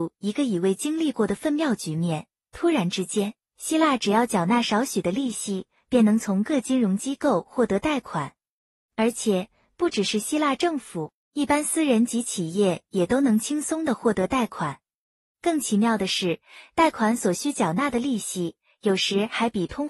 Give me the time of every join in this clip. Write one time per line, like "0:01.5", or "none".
none